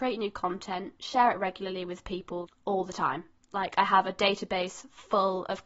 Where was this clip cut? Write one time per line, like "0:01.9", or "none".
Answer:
0:02.4